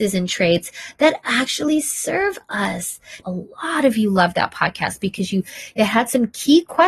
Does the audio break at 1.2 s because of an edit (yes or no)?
no